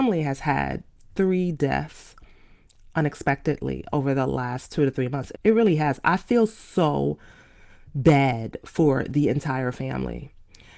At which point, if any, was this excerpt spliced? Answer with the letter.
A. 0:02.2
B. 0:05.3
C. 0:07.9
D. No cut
B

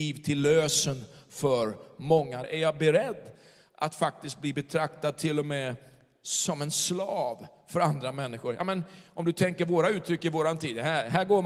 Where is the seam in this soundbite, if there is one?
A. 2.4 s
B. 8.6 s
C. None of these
A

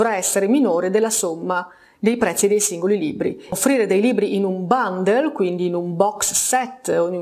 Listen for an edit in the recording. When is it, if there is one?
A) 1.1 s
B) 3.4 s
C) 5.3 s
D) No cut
D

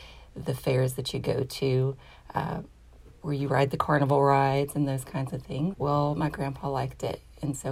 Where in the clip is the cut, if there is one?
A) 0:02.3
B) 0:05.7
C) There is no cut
B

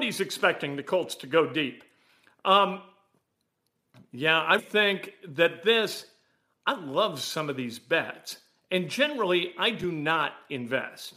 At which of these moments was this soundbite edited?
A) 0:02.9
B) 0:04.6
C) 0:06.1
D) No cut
B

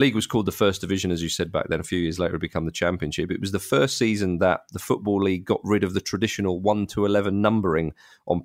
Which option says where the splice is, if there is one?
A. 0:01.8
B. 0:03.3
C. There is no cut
C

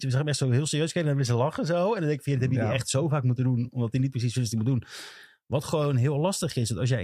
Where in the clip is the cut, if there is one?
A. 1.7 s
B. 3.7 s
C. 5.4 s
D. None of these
D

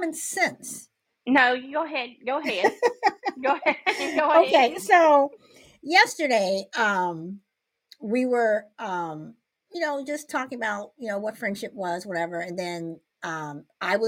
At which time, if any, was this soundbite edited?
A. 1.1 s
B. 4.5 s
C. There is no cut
A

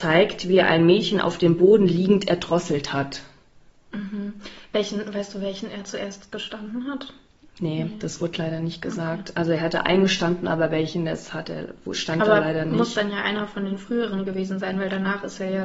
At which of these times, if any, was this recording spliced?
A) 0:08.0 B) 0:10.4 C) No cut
C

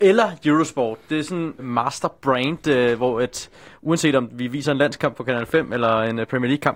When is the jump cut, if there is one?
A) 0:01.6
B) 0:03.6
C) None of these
A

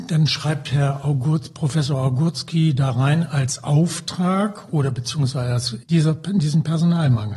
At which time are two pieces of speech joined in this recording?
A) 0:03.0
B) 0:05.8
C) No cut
B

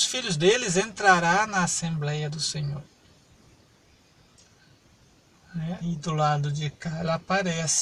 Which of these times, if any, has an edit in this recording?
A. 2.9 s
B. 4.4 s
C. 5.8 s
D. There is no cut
C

